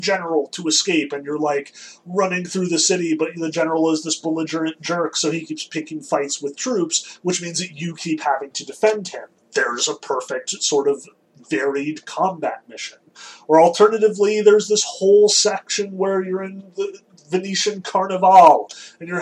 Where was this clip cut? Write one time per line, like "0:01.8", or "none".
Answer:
none